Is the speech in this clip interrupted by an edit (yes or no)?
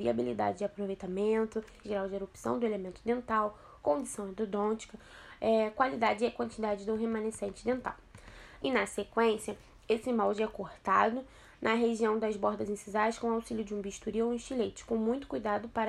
yes